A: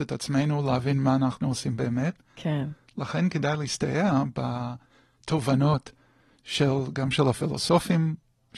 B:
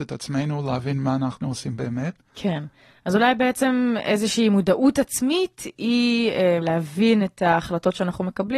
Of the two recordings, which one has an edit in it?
B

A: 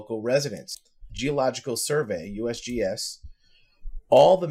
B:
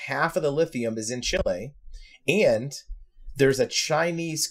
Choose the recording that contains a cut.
A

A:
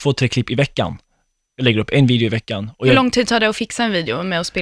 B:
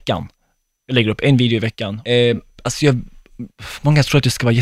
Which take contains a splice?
B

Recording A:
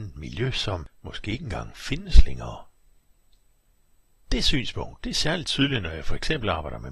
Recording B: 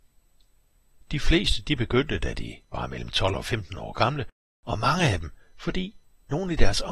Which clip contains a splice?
B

